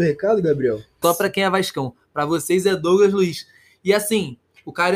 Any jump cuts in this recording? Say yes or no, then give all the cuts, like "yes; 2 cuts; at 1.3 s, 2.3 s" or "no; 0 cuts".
yes; 1 cut; at 1.0 s